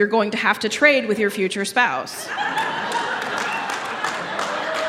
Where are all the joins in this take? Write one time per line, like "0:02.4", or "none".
none